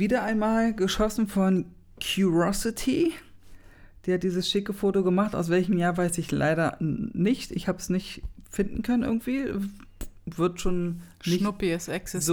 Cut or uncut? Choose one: uncut